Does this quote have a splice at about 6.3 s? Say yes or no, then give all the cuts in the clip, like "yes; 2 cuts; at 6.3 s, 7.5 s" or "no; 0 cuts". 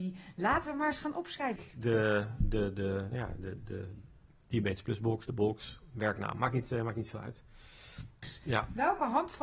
no; 2 cuts; at 1.6 s, 8.2 s